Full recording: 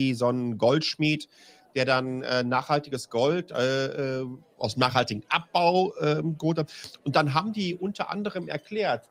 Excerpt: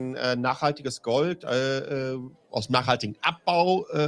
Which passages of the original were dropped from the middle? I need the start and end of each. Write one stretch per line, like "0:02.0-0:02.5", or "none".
none